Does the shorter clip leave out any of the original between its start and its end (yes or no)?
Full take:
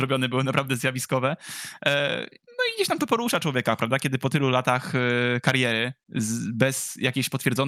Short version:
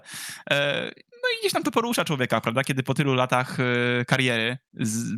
no